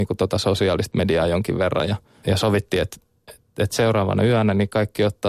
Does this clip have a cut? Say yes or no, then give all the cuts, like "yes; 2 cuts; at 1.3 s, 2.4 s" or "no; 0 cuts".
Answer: yes; 1 cut; at 2.2 s